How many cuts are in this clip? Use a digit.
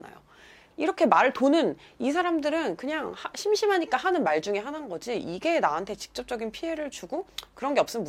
0